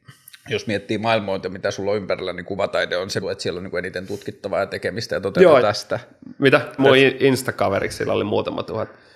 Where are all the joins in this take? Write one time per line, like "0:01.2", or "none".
0:03.2
0:05.6
0:06.8